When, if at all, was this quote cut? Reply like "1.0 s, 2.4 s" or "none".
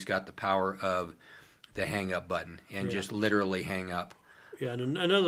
none